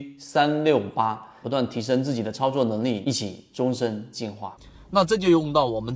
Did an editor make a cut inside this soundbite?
yes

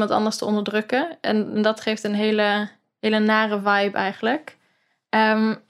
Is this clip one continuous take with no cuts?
yes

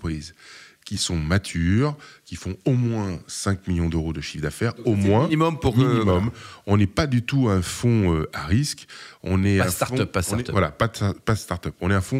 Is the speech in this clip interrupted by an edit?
no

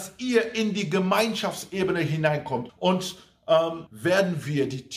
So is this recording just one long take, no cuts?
no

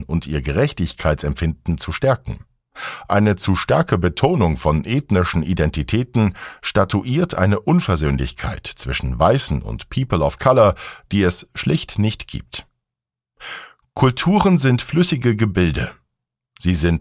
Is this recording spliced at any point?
no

